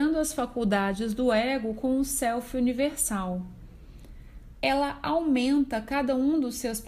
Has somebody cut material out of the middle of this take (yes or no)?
yes